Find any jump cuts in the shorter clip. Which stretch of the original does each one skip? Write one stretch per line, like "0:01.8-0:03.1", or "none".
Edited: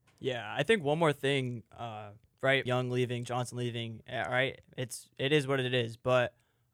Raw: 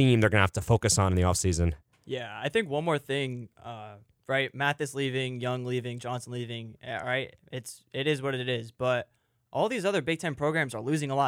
0:04.5-0:05.4